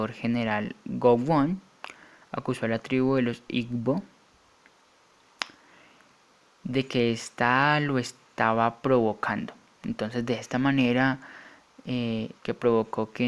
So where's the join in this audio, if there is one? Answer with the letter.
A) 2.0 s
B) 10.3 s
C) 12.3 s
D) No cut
C